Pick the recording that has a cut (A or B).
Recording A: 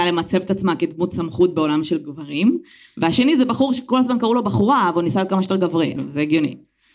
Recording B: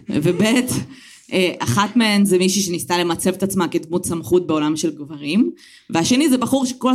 A